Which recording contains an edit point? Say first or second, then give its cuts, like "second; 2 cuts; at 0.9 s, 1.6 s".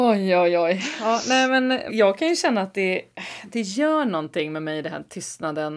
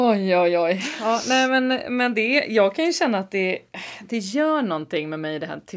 first; 1 cut; at 1.9 s